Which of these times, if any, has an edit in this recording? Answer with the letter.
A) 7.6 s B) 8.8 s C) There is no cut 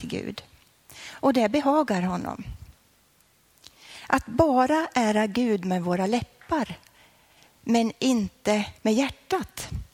B